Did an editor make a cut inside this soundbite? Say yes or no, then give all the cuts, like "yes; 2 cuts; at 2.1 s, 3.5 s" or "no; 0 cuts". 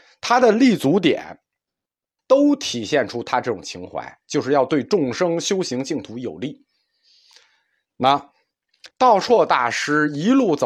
yes; 2 cuts; at 2.2 s, 8.9 s